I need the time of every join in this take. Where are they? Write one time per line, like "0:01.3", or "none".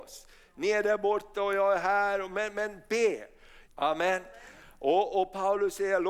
0:03.7